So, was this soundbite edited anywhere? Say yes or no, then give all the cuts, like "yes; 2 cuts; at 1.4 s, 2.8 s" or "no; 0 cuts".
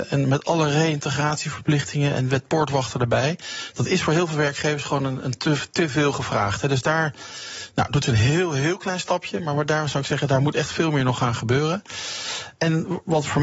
no; 0 cuts